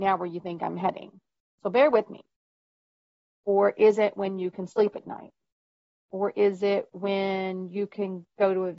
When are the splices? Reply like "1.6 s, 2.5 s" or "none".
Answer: 3.3 s

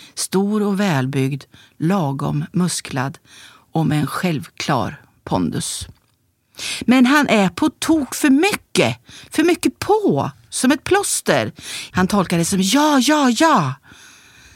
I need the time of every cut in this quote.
11.9 s

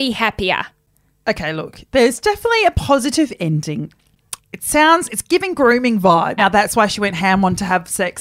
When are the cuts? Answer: 4.4 s, 6.4 s

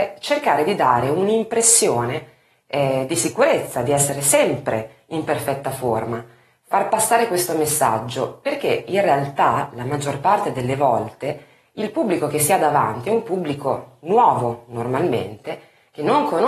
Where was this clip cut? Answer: none

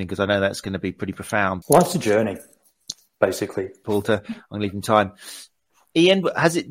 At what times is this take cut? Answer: 1.6 s, 3.8 s

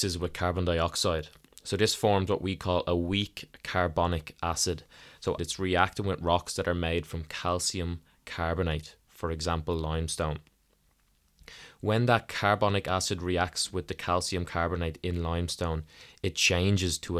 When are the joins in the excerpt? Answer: 5.4 s

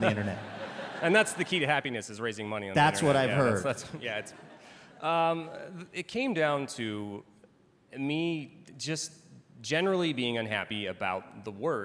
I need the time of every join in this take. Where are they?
none

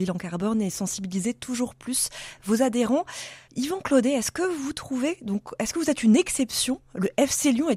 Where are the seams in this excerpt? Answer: 3.4 s

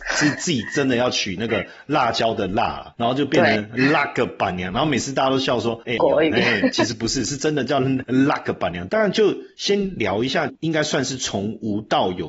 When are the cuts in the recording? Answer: 6.0 s, 8.9 s, 10.5 s

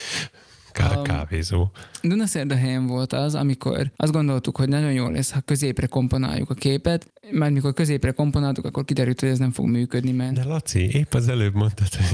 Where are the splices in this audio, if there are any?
none

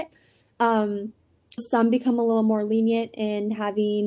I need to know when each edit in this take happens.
1.6 s

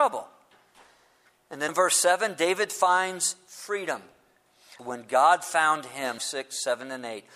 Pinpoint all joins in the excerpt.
1.7 s, 4.8 s, 6.2 s

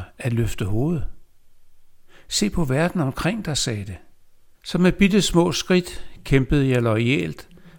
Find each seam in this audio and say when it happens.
4.5 s

